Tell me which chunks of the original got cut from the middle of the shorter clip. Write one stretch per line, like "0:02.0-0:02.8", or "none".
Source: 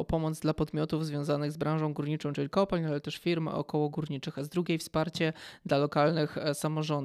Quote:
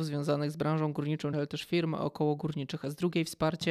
0:02.3-0:02.9